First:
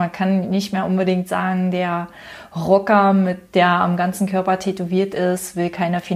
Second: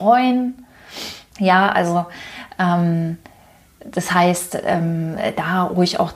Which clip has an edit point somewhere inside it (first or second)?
second